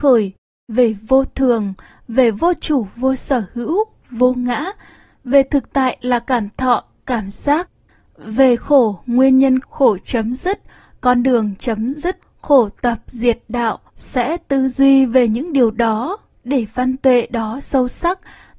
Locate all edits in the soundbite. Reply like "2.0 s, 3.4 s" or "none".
9.6 s, 12.2 s, 13.9 s